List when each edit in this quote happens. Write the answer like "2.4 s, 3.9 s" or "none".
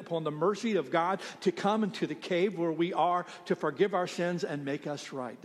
none